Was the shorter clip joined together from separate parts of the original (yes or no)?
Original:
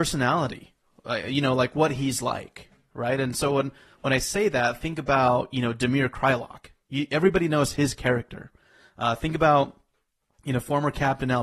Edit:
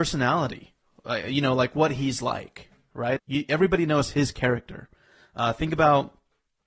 yes